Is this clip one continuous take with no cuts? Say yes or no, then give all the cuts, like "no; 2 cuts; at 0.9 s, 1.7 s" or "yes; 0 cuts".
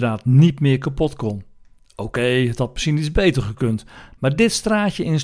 yes; 0 cuts